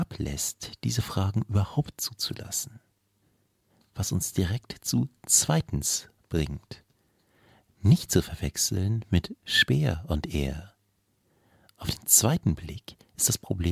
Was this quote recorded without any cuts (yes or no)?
no